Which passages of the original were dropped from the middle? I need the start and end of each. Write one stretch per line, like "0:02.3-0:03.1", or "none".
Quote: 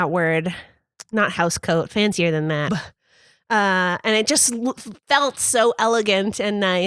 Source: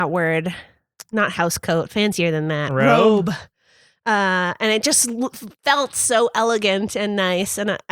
0:02.7-0:03.2